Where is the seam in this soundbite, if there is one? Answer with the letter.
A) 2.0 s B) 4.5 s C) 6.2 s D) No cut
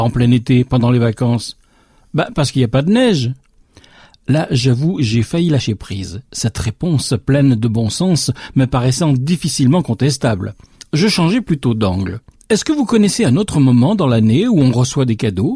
D